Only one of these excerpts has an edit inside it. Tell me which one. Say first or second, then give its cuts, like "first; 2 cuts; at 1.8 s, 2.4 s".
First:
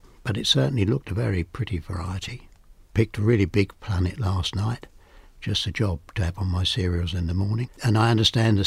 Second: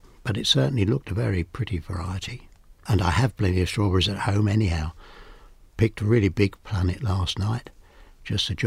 first; 1 cut; at 2.8 s